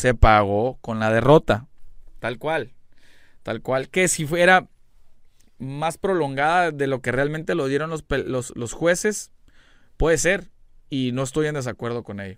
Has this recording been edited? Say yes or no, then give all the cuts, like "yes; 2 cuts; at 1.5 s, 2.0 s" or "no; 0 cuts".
no; 0 cuts